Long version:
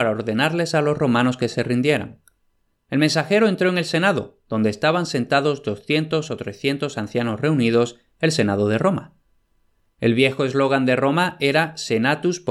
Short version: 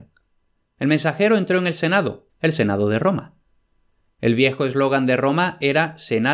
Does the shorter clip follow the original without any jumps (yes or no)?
no